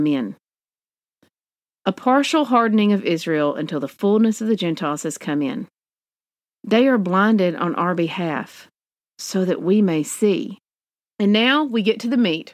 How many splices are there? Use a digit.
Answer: 1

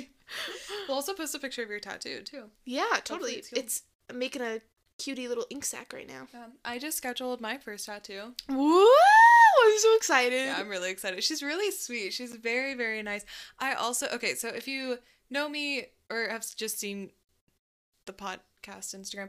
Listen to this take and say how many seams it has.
0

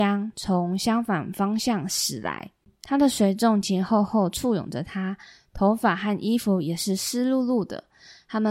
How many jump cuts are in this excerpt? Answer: 1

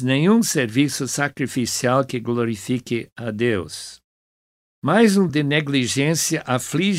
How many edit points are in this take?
1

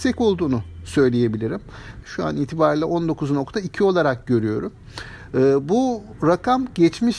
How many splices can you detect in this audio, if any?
1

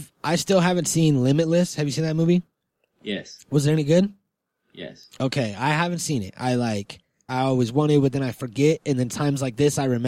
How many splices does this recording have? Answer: 1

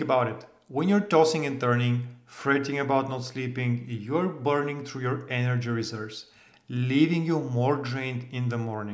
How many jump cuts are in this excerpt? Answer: 0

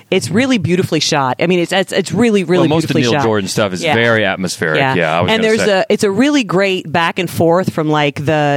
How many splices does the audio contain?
0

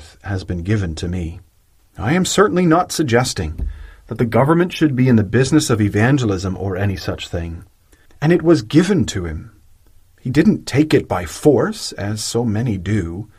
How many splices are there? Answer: 2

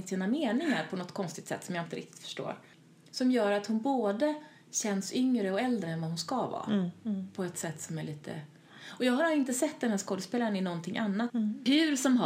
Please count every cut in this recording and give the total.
1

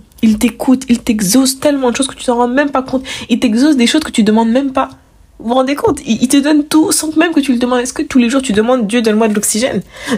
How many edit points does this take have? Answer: 0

